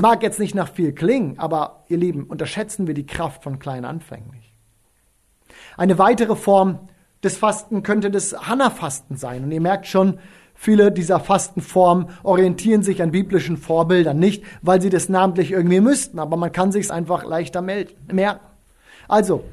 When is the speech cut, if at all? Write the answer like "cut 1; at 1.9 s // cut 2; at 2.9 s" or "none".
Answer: none

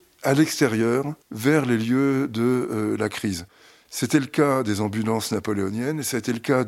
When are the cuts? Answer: none

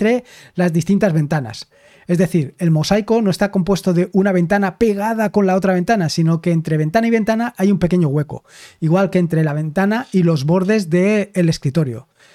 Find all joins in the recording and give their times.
none

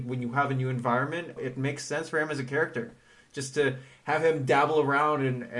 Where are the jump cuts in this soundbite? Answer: cut 1; at 1.4 s

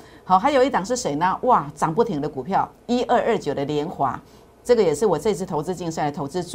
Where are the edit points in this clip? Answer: none

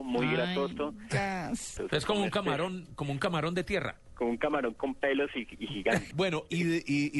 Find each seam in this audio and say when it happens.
cut 1; at 1.8 s // cut 2; at 6.1 s

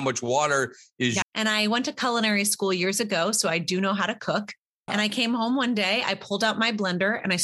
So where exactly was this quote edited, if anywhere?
cut 1; at 1.2 s

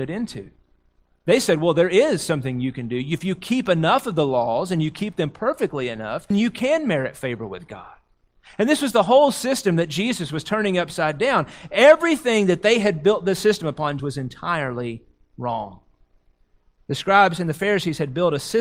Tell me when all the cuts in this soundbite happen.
cut 1; at 6.3 s // cut 2; at 14.0 s

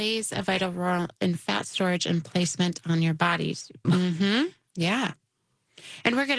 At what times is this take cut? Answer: cut 1; at 3.8 s

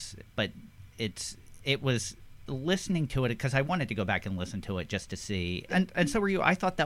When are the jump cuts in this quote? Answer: cut 1; at 5.7 s

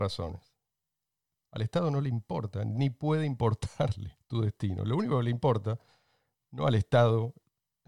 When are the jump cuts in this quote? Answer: cut 1; at 1.4 s

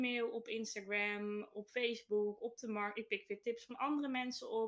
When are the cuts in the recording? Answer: none

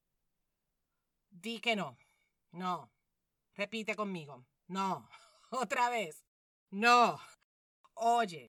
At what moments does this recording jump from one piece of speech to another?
none

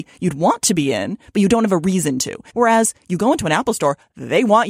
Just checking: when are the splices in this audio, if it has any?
cut 1; at 2.5 s

